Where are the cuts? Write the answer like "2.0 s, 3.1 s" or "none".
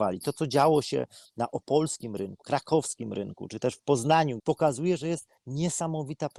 2.4 s, 4.4 s